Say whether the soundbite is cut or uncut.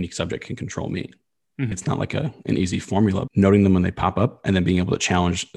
cut